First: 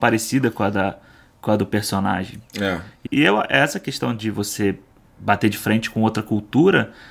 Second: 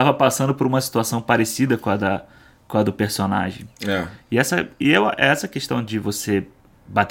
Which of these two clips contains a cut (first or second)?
first